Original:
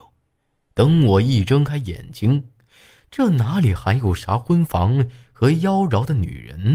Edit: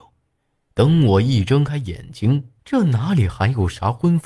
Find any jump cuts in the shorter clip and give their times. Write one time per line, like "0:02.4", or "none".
0:02.6